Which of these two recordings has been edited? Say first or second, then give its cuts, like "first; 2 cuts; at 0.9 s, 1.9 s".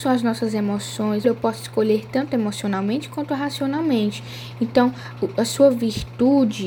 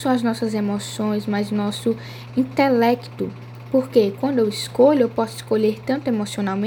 first; 1 cut; at 1.2 s